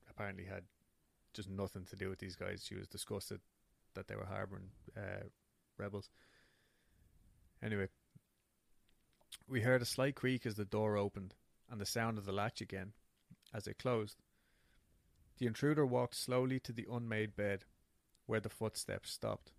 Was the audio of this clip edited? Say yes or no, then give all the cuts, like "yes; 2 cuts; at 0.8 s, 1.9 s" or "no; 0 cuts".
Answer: no; 0 cuts